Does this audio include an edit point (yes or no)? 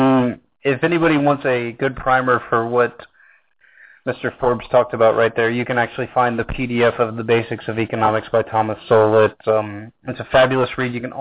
no